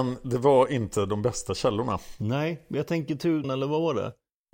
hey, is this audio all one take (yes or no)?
no